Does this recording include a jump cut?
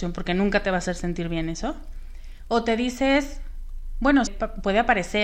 yes; 1 cut; at 4.3 s

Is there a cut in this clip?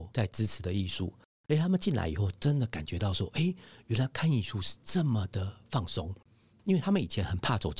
no; 0 cuts

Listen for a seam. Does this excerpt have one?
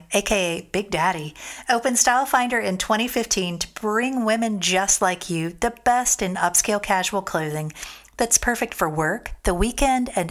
no; 0 cuts

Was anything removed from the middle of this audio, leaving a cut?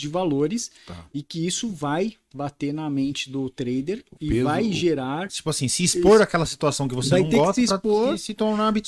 yes; 2 cuts; at 4.2 s, 5.3 s

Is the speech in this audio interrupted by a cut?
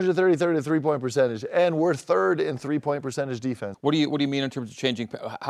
yes; 1 cut; at 3.7 s

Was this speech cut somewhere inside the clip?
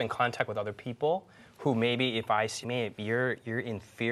yes; 1 cut; at 2.6 s

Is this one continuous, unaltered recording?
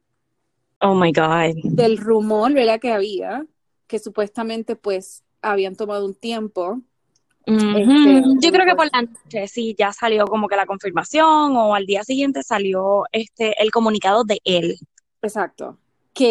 no; 1 cut; at 8.4 s

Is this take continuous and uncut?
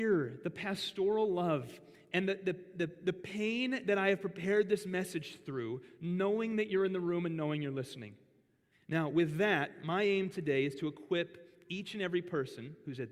no; 1 cut; at 8.7 s

